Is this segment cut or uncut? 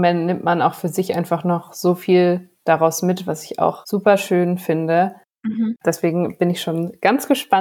uncut